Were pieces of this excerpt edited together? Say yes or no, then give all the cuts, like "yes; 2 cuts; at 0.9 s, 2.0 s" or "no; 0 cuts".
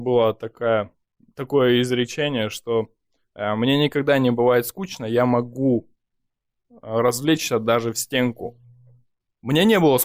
no; 0 cuts